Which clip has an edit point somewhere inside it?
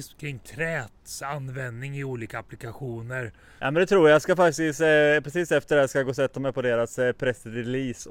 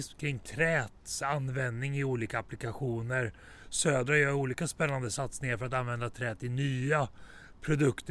first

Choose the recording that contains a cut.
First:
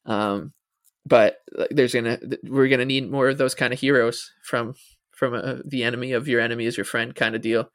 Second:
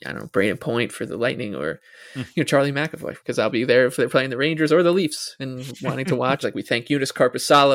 second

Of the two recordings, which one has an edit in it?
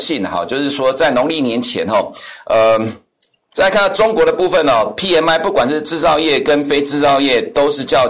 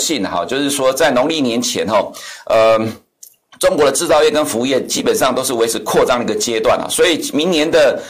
first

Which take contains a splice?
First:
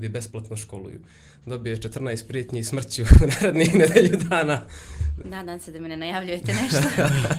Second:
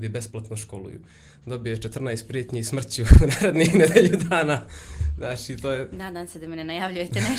first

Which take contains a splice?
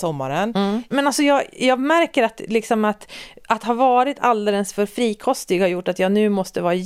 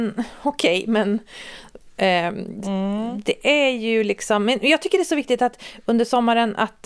first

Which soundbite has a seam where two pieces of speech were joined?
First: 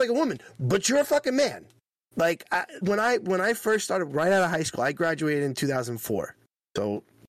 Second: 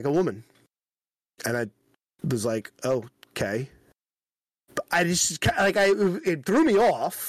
first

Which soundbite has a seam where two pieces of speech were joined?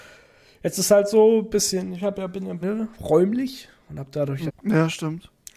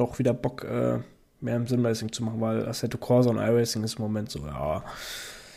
first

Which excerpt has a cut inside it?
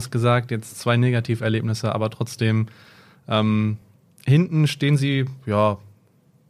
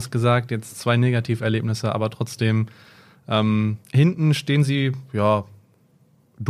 second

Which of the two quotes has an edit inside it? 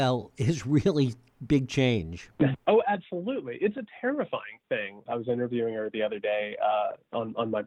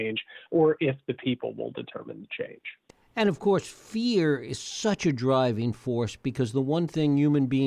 first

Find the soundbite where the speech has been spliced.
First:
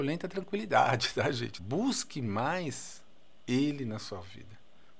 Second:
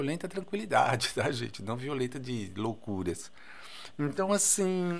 first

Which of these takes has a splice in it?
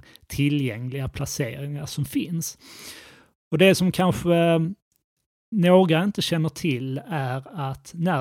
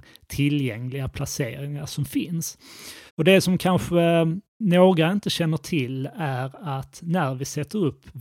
second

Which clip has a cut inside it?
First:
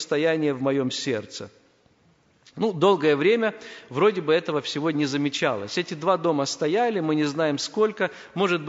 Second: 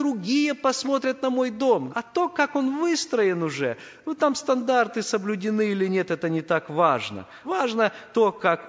second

